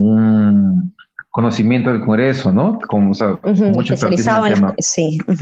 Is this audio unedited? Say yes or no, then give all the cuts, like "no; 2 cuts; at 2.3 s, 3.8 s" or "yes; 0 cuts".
yes; 0 cuts